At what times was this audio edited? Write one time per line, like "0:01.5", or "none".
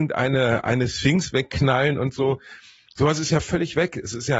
none